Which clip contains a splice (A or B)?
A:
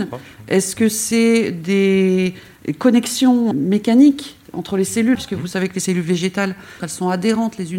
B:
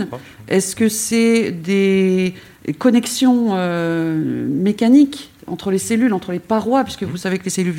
A